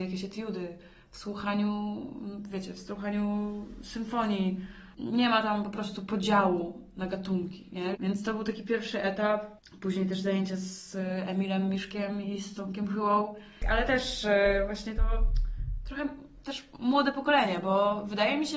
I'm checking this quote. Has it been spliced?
yes; 1 cut; at 7.9 s

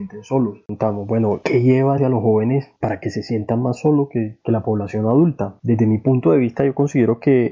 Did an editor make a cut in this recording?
yes; 1 cut; at 2.0 s

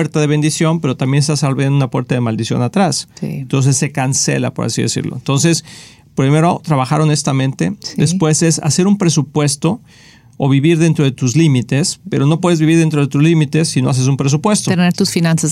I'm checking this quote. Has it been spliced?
no; 0 cuts

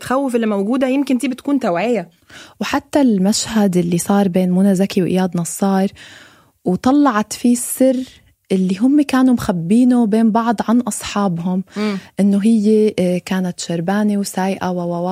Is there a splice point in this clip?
no; 0 cuts

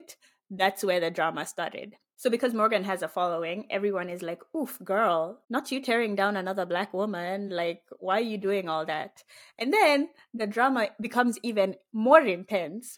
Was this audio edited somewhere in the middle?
no; 0 cuts

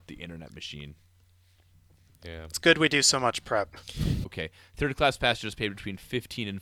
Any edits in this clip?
no; 0 cuts

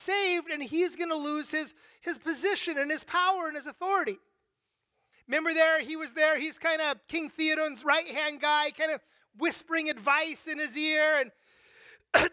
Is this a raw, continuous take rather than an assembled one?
no; 2 cuts; at 5.1 s, 7.8 s

